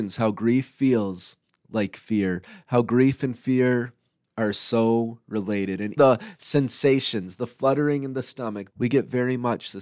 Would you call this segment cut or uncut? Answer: cut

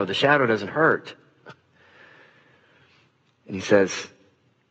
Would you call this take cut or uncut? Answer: uncut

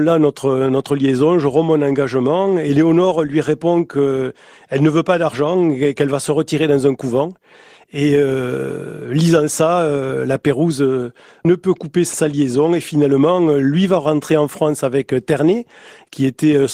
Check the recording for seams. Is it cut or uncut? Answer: uncut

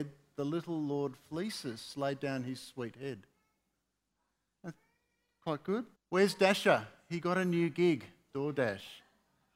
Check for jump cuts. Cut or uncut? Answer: cut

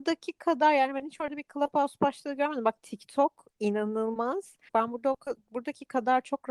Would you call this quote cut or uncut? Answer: cut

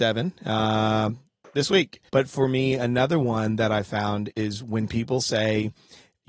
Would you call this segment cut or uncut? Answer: cut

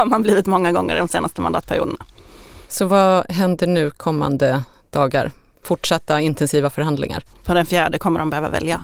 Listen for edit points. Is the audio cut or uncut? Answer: cut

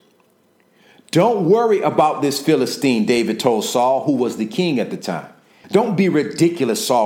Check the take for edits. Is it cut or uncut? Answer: cut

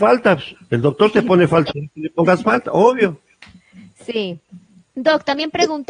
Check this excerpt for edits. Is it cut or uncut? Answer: cut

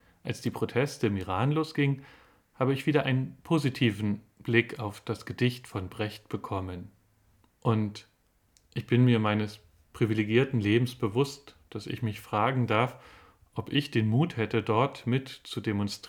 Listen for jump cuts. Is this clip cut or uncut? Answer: cut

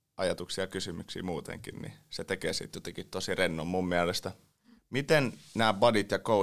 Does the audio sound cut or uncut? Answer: cut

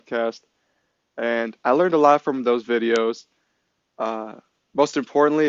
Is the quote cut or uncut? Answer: uncut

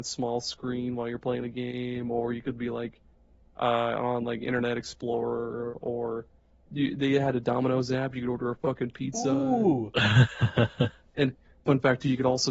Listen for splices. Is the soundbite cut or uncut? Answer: uncut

